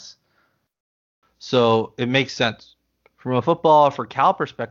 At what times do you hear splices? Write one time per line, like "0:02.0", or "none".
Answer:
0:01.2